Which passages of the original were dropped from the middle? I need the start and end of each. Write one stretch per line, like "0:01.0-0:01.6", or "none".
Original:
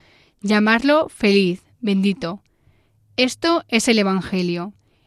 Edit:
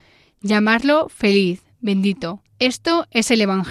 0:02.5-0:03.1